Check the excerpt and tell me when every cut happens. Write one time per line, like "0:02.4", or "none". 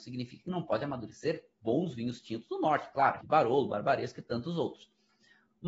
0:03.2